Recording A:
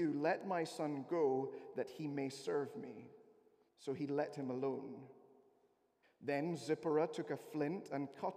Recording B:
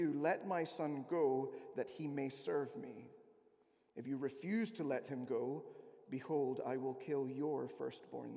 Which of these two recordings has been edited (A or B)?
A